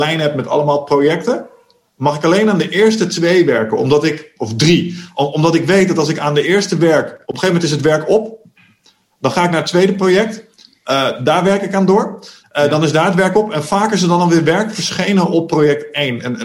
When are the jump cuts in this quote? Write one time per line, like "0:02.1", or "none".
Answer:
none